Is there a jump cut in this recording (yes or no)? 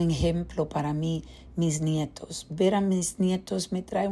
no